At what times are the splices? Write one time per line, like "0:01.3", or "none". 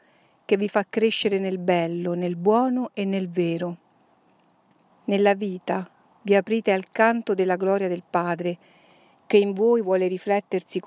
0:04.9